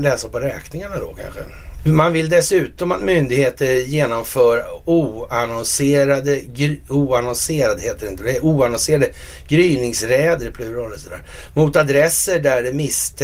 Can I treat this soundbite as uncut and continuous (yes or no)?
no